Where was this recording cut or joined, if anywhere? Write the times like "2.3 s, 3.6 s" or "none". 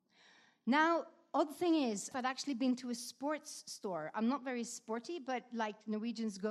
2.1 s

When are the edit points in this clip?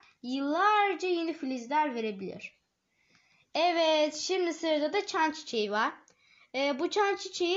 none

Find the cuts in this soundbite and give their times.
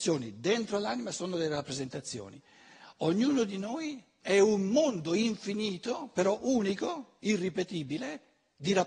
none

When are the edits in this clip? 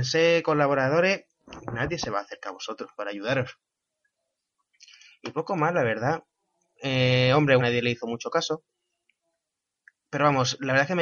7.6 s

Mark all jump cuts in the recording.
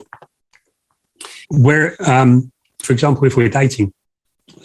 1.4 s, 2.8 s

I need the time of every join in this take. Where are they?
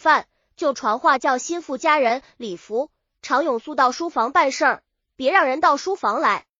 5.1 s

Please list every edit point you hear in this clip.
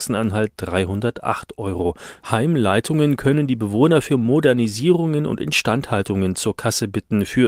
2.2 s

